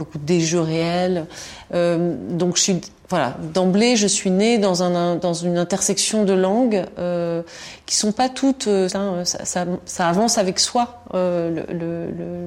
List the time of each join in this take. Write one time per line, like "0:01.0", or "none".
0:01.7
0:08.9